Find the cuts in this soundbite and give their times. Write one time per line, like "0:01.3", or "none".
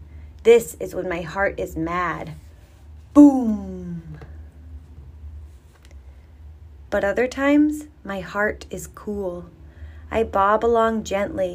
none